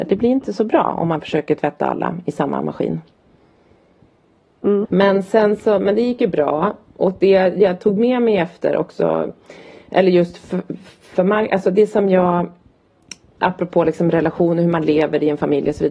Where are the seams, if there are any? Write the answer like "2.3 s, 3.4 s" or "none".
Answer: 4.9 s